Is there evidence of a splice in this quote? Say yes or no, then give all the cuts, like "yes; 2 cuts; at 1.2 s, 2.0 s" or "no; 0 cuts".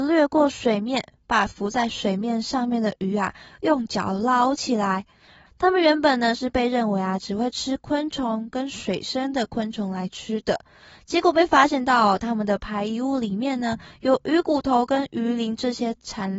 yes; 1 cut; at 5.5 s